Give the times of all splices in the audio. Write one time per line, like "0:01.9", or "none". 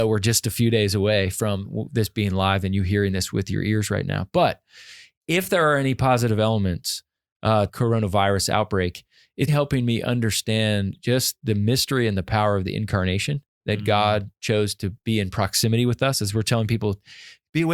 0:07.7
0:09.5